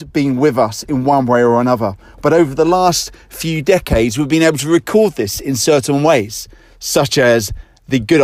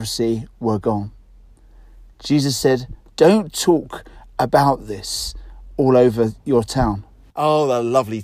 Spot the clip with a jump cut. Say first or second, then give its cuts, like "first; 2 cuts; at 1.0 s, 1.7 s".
second; 1 cut; at 7.3 s